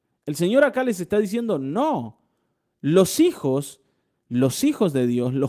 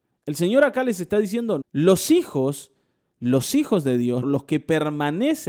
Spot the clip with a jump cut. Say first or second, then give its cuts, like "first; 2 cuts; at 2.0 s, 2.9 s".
second; 2 cuts; at 1.6 s, 4.2 s